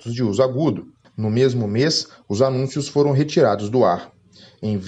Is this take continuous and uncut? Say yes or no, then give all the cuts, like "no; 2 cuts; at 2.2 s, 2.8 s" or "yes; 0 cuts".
no; 1 cut; at 1.1 s